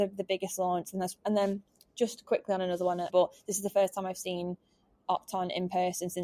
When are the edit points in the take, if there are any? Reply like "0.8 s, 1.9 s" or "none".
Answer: 3.1 s